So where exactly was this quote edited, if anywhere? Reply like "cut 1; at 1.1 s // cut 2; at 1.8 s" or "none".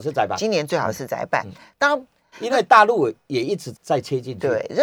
cut 1; at 2.3 s // cut 2; at 3.7 s